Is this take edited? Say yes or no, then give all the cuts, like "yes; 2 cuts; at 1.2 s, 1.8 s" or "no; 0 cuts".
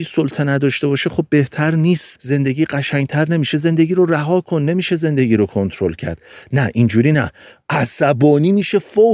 yes; 1 cut; at 2.2 s